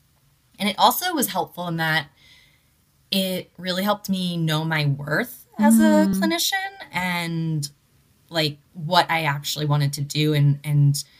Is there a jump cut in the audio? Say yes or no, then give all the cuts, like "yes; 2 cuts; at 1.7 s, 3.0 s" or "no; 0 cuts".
no; 0 cuts